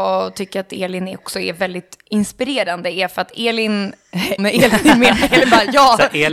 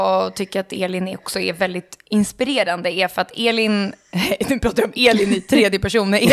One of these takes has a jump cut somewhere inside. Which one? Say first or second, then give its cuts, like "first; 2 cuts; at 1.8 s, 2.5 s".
first; 1 cut; at 4.4 s